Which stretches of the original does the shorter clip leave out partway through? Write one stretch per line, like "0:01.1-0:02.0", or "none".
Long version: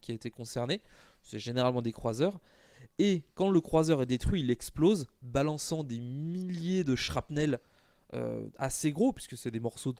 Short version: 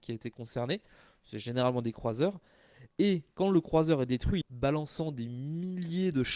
0:04.4-0:05.1